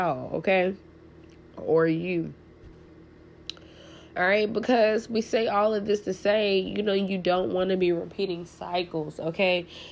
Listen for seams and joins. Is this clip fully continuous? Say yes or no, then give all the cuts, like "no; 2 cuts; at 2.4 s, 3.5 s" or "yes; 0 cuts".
yes; 0 cuts